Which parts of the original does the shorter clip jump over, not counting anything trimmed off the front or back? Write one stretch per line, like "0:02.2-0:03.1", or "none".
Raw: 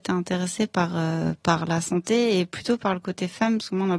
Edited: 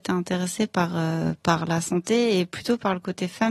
none